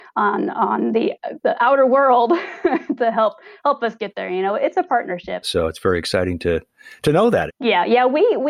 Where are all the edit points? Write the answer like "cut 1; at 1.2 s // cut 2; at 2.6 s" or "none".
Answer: cut 1; at 5.4 s // cut 2; at 7.5 s